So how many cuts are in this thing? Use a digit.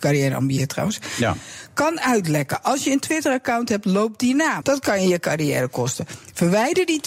1